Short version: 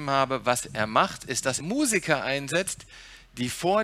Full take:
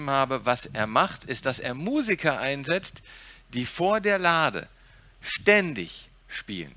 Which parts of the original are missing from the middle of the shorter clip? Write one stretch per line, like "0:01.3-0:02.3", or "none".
0:01.6-0:01.8